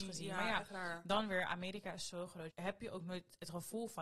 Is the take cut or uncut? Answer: cut